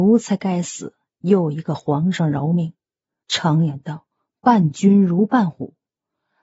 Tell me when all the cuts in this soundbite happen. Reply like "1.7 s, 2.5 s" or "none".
3.2 s